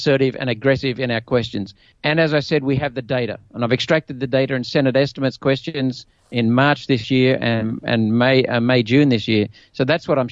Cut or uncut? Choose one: cut